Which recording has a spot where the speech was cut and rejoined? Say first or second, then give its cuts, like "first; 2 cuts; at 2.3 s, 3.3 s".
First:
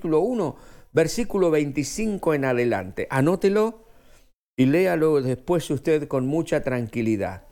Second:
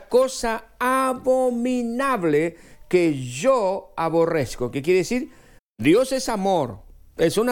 second; 1 cut; at 5.6 s